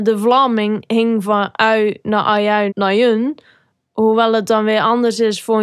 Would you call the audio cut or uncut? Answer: cut